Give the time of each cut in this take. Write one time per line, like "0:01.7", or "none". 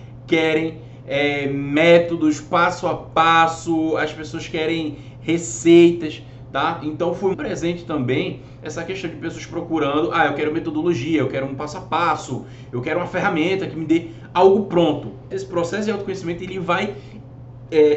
0:07.3
0:15.3